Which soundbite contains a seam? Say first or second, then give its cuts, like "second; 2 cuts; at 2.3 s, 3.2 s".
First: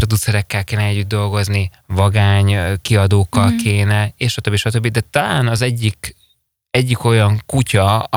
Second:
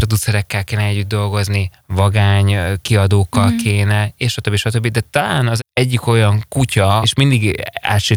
second; 2 cuts; at 5.6 s, 7.0 s